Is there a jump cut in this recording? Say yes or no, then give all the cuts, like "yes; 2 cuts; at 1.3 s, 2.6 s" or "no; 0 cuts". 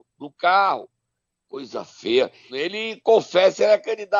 yes; 1 cut; at 2.5 s